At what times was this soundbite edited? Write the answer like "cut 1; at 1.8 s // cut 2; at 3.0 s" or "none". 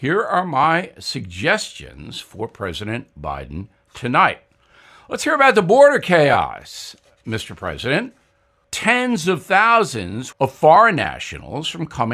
cut 1; at 8.6 s // cut 2; at 10.3 s

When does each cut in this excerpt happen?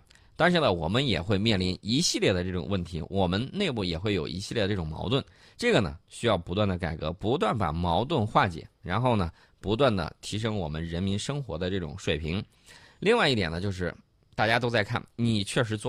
none

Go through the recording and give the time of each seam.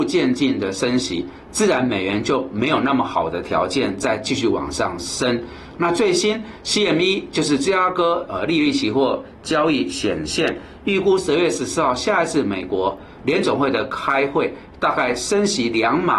cut 1; at 5.7 s

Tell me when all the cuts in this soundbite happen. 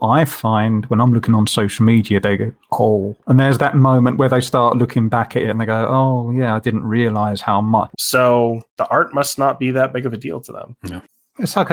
cut 1; at 7.9 s

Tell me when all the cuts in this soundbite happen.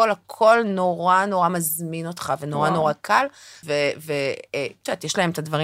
cut 1; at 3.6 s

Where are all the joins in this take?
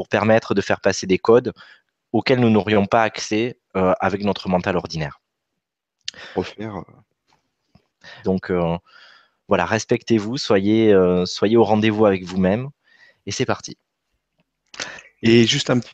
cut 1; at 6.4 s // cut 2; at 8.2 s

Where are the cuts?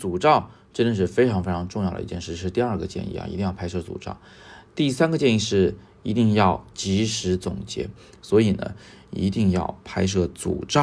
cut 1; at 8.1 s

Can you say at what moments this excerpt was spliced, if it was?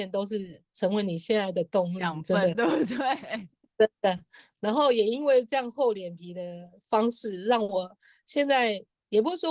none

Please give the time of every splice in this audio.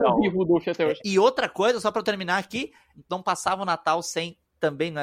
cut 1; at 1.0 s // cut 2; at 2.9 s

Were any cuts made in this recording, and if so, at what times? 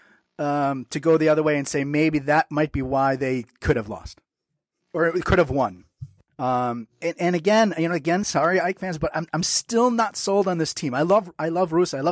cut 1; at 6.3 s // cut 2; at 8.2 s

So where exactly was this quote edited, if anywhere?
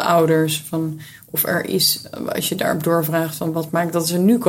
none

